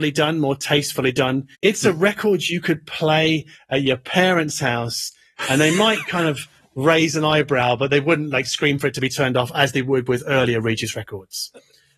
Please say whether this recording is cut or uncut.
cut